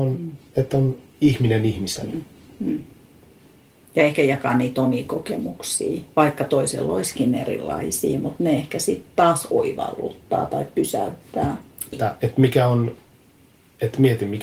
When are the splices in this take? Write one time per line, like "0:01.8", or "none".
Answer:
0:11.9